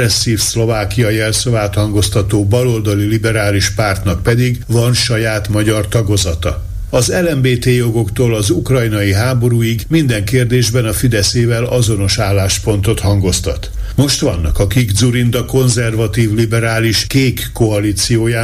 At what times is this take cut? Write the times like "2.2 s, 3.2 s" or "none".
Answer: 6.9 s